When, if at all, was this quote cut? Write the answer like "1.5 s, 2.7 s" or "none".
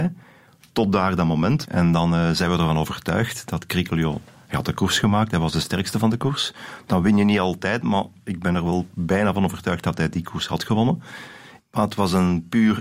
1.7 s, 11.6 s